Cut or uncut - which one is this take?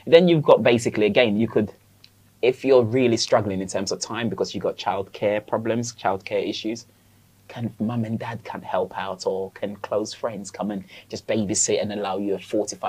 uncut